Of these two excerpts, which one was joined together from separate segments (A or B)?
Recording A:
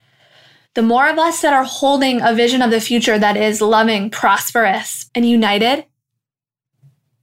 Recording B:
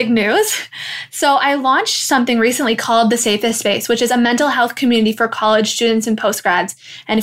A